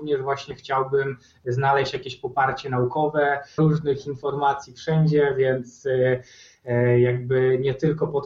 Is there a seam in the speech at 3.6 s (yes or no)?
yes